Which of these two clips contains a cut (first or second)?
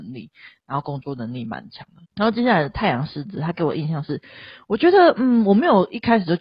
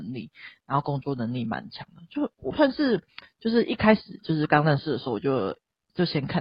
first